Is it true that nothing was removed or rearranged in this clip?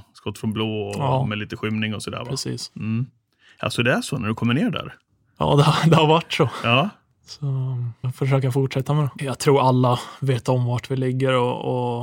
no; 2 cuts; at 8.0 s, 9.2 s

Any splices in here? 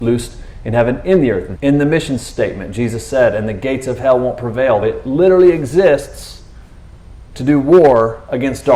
yes; 2 cuts; at 1.6 s, 4.8 s

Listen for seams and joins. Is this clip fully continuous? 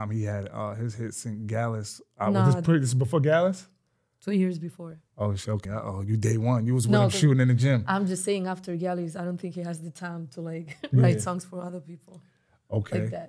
no; 1 cut; at 5.6 s

